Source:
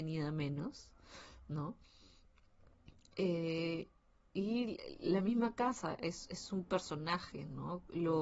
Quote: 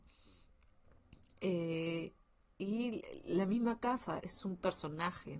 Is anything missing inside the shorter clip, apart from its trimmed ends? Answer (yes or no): yes